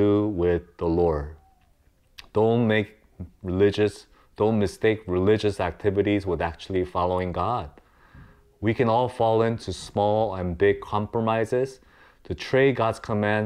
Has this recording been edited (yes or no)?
no